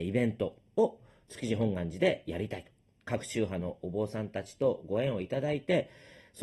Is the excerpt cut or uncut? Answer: uncut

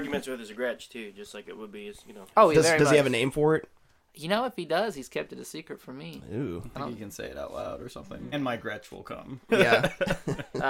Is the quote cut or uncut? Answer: cut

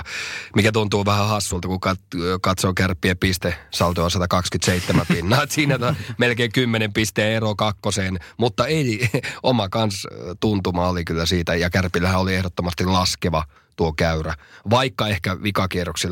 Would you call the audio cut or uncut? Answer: uncut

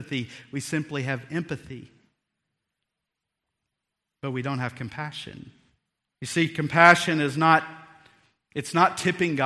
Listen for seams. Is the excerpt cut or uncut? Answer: cut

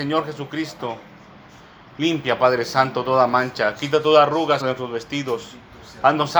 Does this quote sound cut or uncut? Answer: cut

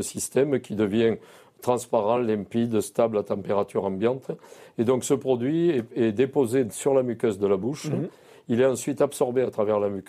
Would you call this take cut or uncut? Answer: uncut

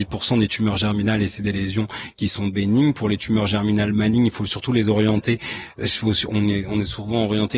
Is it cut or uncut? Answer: uncut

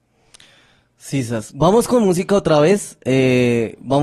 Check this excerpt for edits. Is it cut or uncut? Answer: uncut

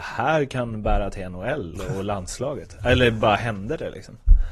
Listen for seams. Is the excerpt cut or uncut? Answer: uncut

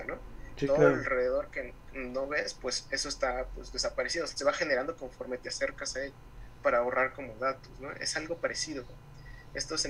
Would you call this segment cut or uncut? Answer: uncut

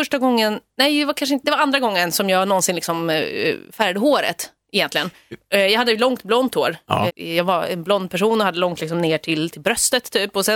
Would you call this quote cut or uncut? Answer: cut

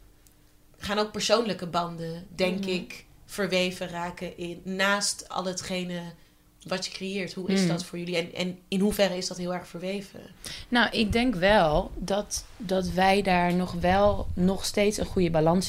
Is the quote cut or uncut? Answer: uncut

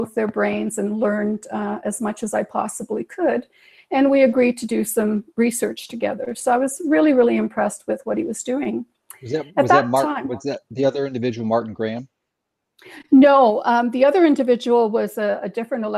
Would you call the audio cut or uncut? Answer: uncut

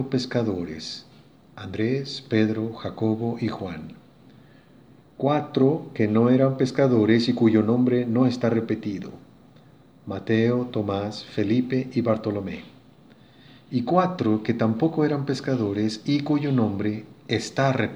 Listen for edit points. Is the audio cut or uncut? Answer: uncut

